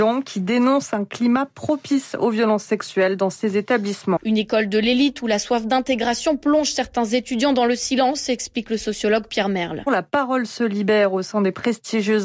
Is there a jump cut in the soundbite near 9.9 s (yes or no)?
yes